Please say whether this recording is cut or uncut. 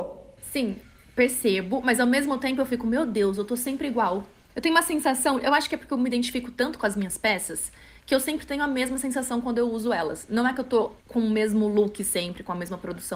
cut